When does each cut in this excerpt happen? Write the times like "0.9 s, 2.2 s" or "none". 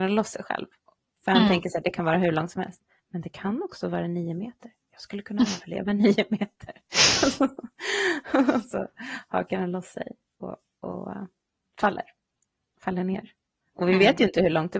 none